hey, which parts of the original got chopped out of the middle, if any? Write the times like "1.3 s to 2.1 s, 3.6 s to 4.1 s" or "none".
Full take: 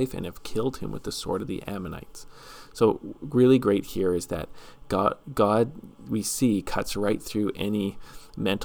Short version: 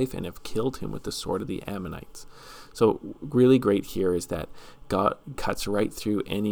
5.3 s to 6.6 s